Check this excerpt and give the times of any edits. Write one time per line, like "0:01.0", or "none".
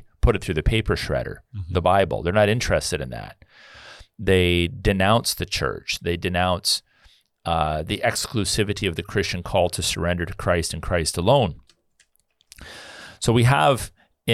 0:06.0